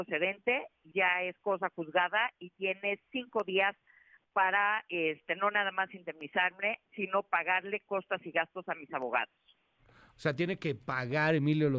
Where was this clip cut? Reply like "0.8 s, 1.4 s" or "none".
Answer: 0.9 s